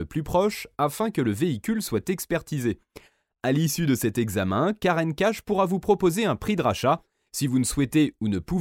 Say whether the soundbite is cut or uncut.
cut